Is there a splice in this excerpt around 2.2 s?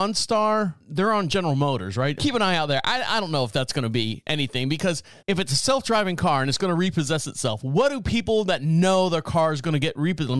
yes; 2 cuts; at 2.2 s, 5.2 s

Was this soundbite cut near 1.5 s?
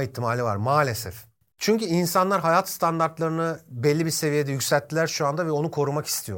yes; 1 cut; at 1.5 s

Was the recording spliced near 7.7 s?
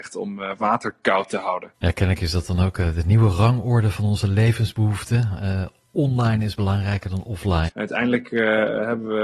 yes; 2 cuts; at 1.7 s, 7.7 s

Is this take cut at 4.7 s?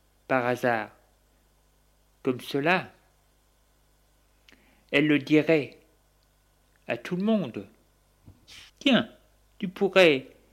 no; 1 cut; at 8.7 s

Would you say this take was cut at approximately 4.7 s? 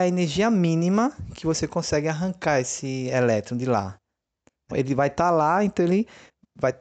yes; 1 cut; at 4.7 s

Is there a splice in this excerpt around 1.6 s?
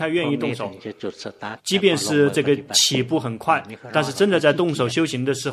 yes; 1 cut; at 1.6 s

